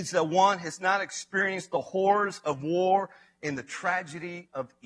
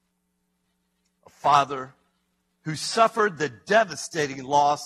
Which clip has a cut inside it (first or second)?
second